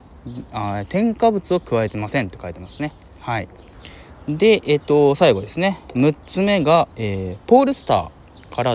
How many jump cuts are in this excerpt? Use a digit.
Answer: 0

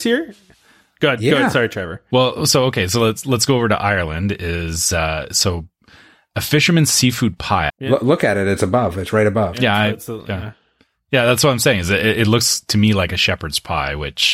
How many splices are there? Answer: 1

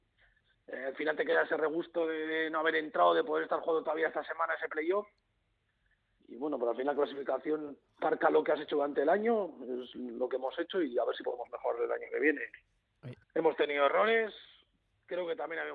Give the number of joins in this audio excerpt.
1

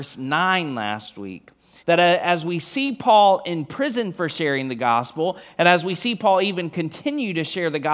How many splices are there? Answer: 1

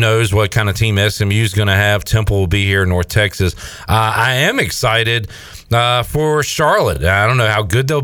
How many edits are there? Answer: 0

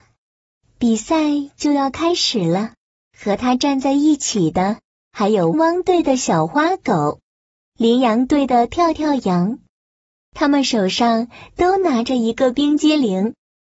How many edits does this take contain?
2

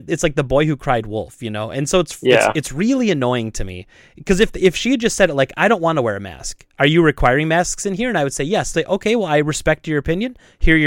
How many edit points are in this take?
1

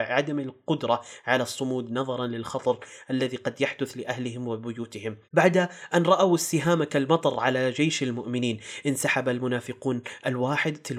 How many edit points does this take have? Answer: 1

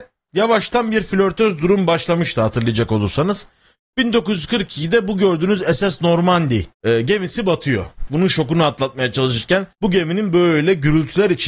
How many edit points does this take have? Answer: 3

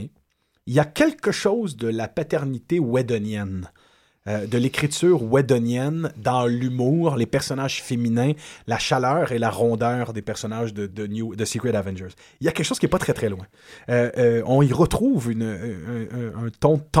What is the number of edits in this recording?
1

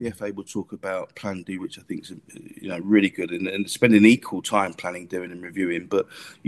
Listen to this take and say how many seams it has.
1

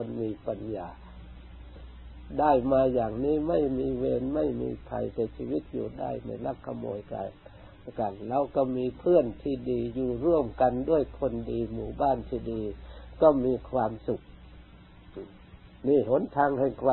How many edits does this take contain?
1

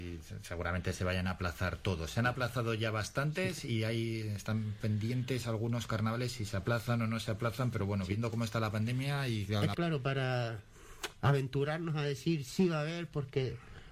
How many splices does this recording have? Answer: 1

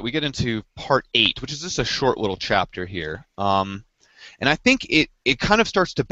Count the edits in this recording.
0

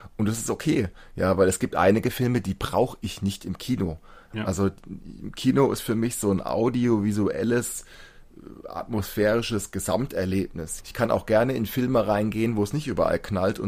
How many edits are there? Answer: 2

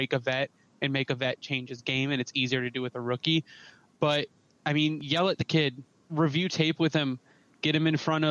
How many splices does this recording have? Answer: 1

